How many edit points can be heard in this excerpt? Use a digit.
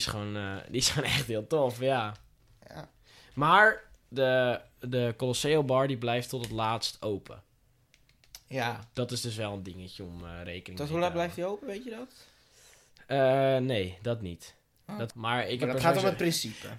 1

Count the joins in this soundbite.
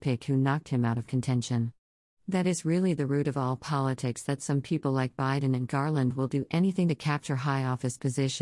0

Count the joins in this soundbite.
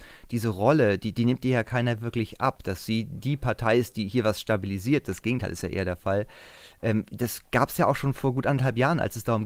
0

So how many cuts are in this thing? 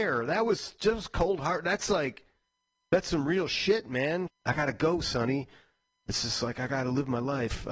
1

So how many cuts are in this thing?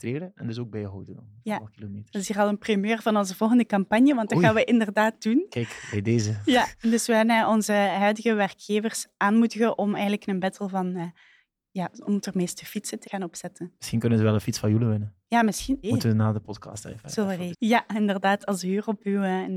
3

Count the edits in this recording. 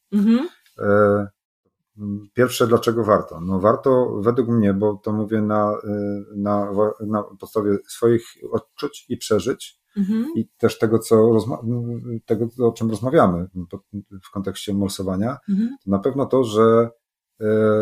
0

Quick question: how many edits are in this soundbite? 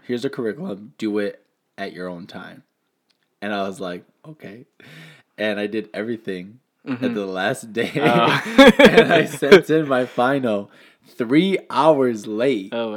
0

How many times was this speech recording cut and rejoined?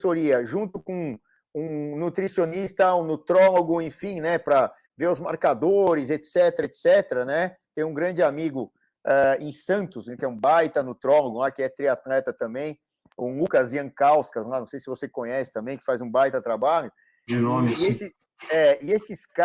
0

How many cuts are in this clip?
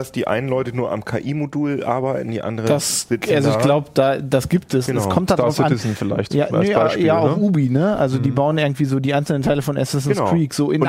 1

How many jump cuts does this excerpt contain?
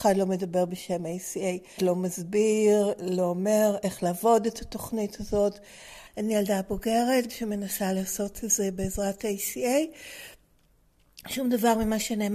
3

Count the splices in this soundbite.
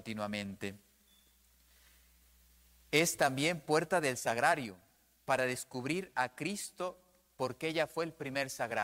0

